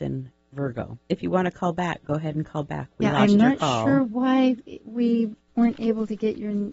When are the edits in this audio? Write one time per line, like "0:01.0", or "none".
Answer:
0:01.0